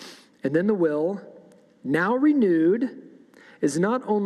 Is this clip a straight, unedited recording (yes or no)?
yes